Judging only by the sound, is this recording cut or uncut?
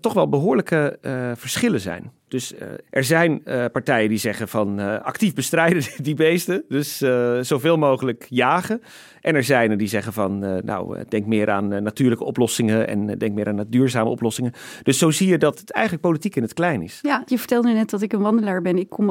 uncut